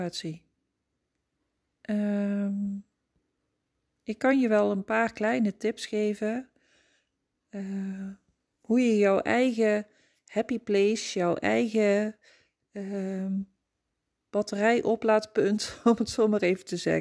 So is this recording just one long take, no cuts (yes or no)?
yes